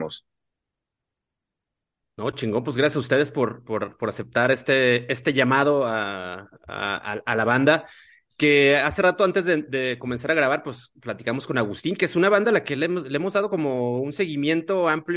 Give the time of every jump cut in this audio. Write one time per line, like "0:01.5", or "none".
none